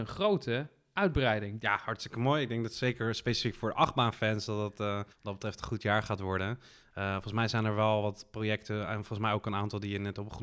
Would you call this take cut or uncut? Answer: cut